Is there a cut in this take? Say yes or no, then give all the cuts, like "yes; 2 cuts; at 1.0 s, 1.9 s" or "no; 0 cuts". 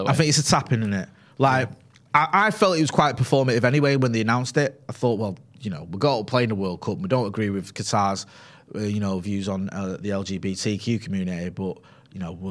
no; 0 cuts